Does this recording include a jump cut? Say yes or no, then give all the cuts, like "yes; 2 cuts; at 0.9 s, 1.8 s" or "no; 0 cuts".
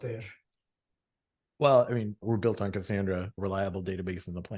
yes; 2 cuts; at 2.2 s, 3.4 s